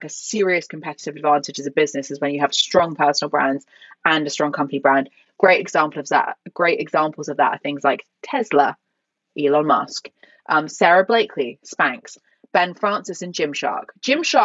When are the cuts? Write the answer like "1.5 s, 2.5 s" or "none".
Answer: none